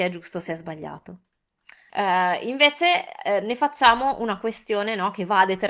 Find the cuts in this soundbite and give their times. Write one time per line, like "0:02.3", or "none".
0:01.9